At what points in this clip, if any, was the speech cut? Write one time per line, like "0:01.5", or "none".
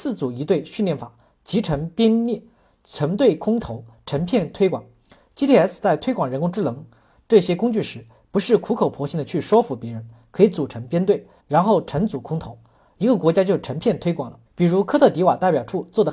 0:11.4
0:14.5

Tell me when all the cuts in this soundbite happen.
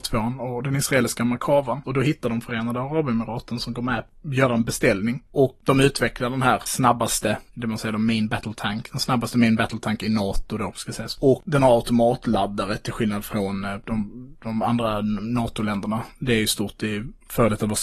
0:01.8

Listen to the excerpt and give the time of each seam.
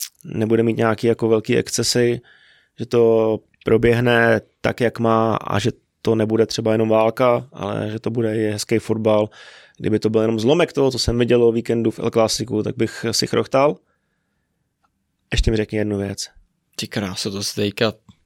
none

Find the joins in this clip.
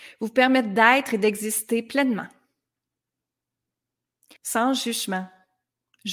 0:04.4

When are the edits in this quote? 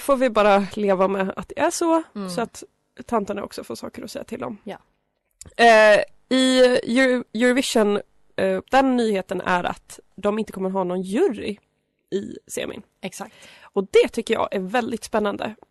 0:08.6

